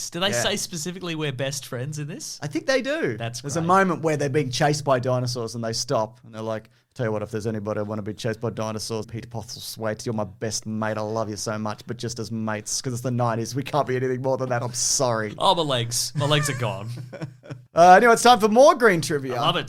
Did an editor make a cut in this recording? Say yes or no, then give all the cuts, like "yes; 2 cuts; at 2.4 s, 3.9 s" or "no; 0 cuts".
yes; 1 cut; at 9.0 s